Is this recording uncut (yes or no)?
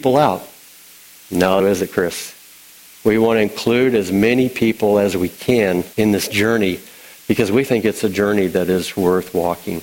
no